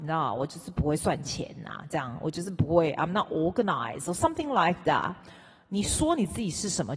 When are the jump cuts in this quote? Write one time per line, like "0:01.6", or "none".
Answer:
none